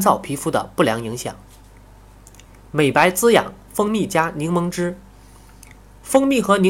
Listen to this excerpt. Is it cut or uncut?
uncut